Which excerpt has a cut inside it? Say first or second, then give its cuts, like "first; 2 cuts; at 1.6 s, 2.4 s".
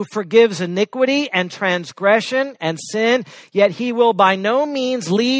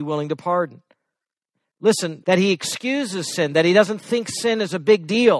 second; 1 cut; at 2.2 s